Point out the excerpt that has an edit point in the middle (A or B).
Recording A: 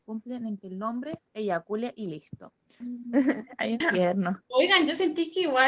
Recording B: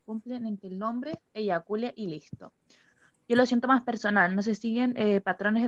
A